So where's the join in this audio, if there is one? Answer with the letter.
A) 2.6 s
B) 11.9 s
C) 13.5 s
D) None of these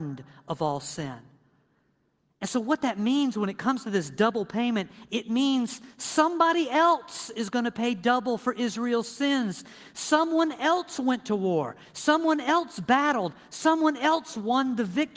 D